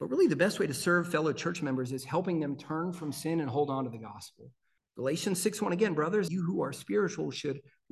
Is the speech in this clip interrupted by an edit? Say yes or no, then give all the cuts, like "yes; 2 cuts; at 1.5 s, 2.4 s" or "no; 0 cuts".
yes; 2 cuts; at 4.8 s, 6.3 s